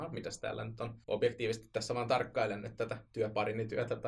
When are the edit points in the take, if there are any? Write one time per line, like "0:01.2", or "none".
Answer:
0:01.0